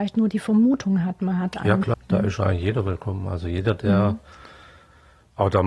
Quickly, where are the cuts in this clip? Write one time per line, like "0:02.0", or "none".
0:01.9